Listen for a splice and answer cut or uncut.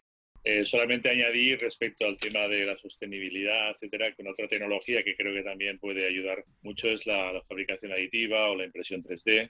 uncut